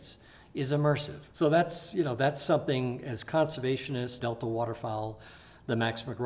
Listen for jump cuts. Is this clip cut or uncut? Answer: cut